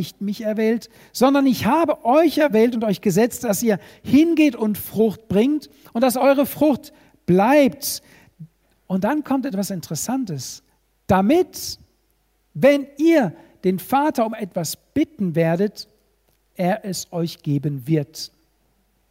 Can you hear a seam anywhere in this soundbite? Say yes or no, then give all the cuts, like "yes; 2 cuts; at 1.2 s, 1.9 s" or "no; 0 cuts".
no; 0 cuts